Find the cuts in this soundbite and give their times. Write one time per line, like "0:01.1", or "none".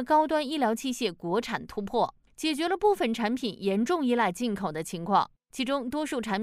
none